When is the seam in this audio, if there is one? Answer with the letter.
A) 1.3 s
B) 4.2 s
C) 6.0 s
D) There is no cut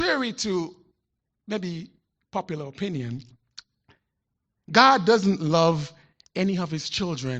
D